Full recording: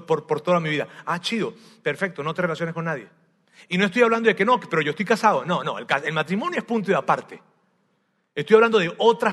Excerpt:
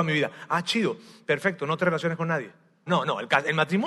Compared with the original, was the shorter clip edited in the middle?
yes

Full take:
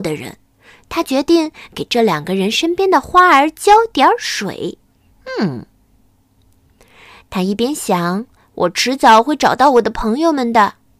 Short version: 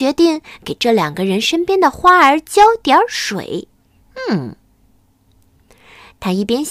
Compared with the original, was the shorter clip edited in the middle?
no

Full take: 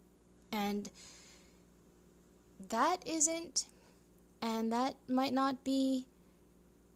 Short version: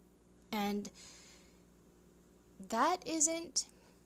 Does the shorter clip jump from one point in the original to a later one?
no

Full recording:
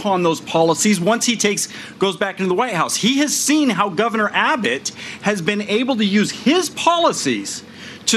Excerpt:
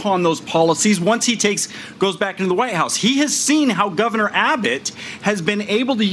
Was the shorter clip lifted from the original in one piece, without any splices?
yes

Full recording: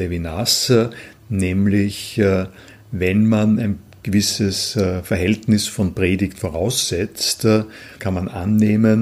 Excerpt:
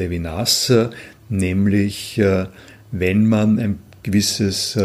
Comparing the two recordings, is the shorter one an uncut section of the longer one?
yes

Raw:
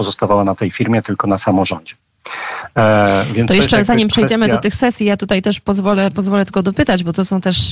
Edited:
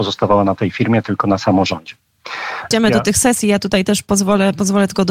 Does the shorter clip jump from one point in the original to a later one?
yes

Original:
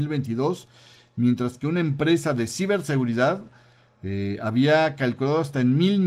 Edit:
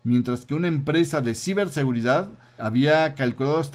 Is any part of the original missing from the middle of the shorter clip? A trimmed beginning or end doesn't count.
yes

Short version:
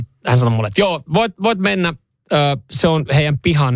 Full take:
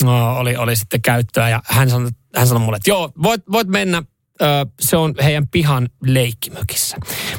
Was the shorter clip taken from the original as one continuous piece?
yes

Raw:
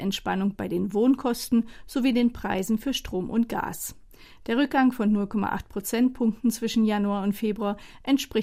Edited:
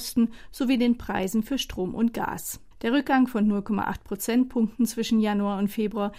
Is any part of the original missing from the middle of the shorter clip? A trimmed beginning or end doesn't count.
yes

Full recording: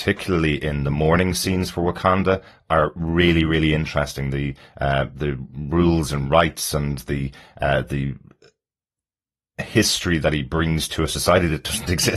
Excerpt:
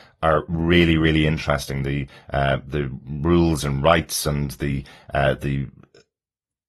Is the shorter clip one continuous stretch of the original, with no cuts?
yes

